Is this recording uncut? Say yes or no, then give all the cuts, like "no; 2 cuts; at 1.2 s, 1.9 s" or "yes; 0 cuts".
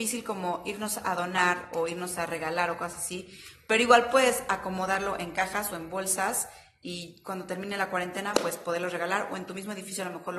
yes; 0 cuts